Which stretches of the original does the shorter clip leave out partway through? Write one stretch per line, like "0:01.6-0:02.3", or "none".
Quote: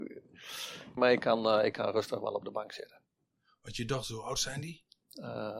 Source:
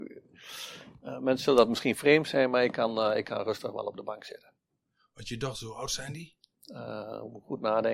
0:01.0-0:02.5